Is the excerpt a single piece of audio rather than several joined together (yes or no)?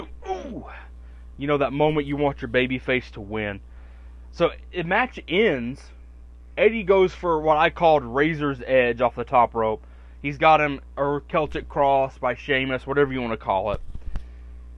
yes